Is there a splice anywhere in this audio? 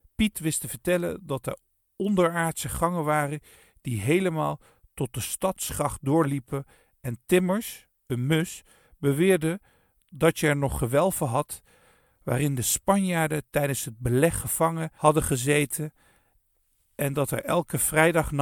no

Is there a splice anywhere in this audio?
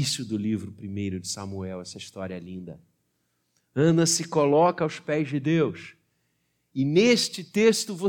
no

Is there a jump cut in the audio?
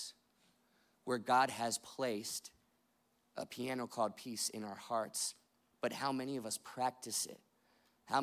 no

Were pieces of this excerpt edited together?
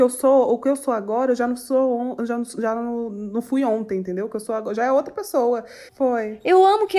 yes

